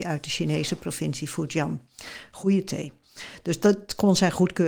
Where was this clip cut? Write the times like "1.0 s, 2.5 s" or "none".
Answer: none